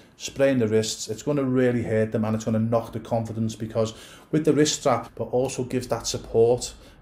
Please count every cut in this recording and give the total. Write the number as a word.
one